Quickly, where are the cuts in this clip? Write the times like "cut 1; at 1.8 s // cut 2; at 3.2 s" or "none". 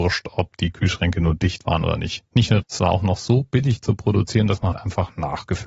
cut 1; at 2.6 s // cut 2; at 4.7 s